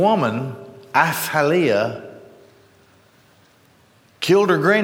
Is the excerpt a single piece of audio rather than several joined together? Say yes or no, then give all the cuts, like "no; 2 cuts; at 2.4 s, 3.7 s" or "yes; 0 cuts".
yes; 0 cuts